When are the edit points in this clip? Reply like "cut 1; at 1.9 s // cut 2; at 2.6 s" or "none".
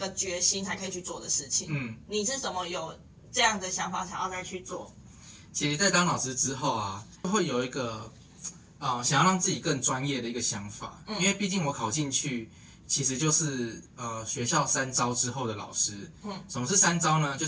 none